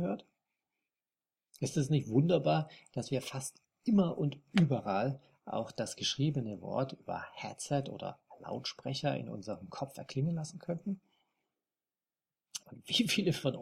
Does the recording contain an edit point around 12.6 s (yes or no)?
yes